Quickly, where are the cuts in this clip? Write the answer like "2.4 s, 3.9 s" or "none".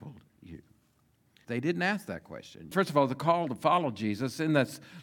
1.4 s, 2.7 s